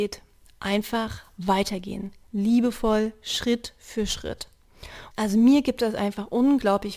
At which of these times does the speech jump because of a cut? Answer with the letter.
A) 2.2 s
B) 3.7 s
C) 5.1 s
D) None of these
C